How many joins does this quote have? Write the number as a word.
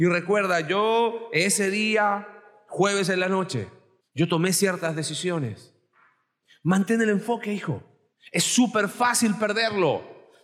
one